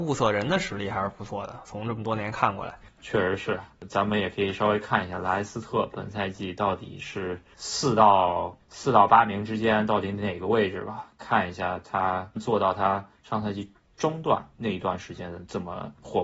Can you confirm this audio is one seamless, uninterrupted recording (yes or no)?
no